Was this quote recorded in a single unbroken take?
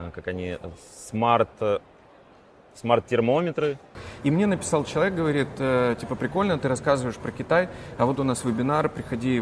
yes; 0 cuts

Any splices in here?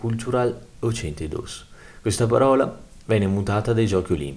no; 0 cuts

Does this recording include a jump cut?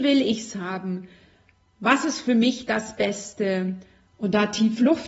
yes; 1 cut; at 4.1 s

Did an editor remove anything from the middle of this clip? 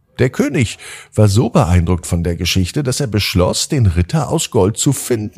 no; 0 cuts

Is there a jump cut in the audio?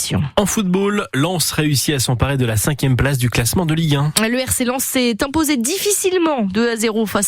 no; 0 cuts

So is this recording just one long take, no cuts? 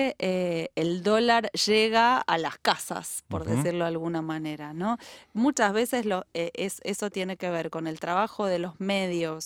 yes; 0 cuts

